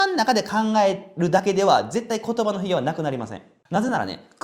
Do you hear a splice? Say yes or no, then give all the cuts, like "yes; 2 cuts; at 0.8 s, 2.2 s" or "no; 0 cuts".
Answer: no; 0 cuts